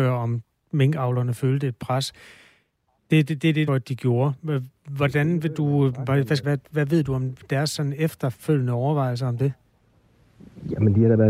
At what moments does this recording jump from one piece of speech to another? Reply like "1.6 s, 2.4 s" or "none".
3.7 s, 6.4 s